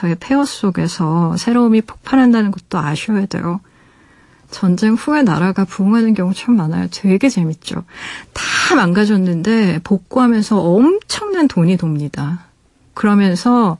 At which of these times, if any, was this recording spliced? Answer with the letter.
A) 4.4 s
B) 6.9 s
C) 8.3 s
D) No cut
D